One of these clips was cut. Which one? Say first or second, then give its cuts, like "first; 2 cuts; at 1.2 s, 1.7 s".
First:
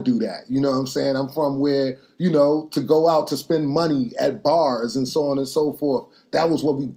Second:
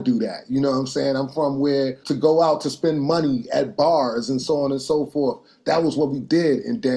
second; 1 cut; at 2.0 s